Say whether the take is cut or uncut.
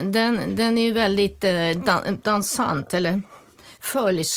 uncut